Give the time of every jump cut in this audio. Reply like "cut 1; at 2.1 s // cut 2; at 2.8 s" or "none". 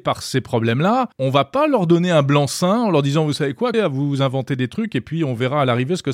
cut 1; at 1.1 s // cut 2; at 3.7 s